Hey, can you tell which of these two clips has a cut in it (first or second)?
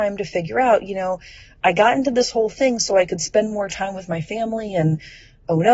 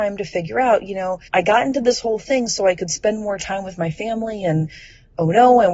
second